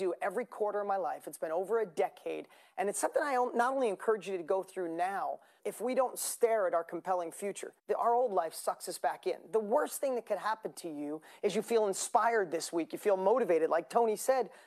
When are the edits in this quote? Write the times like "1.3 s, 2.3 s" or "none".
5.6 s, 7.8 s